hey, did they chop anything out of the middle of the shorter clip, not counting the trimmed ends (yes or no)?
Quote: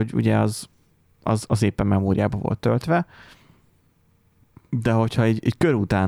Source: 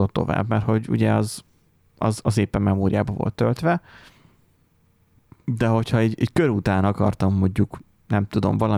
no